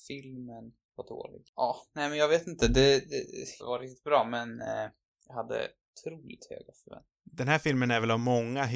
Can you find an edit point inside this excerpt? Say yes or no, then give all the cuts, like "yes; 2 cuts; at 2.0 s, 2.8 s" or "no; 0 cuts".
yes; 1 cut; at 3.6 s